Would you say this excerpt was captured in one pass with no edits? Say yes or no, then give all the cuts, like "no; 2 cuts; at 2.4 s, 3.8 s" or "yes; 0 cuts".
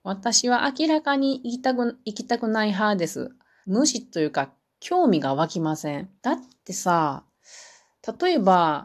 no; 2 cuts; at 3.6 s, 6.2 s